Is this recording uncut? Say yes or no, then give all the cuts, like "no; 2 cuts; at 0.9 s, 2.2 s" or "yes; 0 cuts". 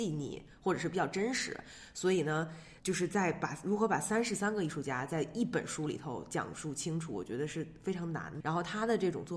no; 1 cut; at 8.4 s